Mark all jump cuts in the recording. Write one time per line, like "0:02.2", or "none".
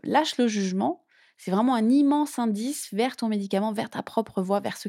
none